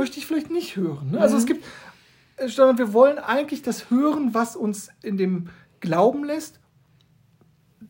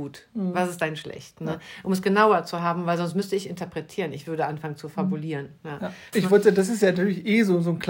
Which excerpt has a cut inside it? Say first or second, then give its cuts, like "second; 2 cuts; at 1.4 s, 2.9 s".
second; 1 cut; at 6.1 s